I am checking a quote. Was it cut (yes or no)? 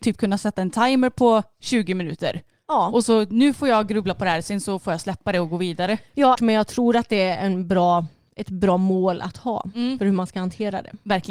yes